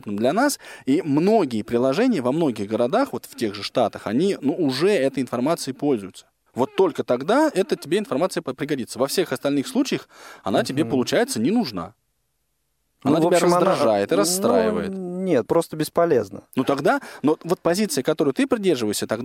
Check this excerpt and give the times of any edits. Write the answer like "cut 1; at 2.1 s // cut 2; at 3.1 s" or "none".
cut 1; at 6.5 s // cut 2; at 15.5 s